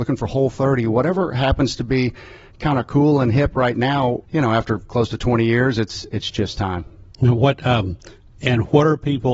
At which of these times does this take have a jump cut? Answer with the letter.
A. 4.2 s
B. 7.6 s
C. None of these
A